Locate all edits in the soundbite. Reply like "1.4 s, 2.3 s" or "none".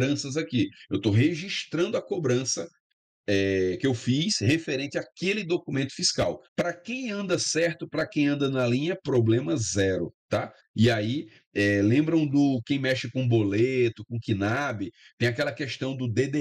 6.4 s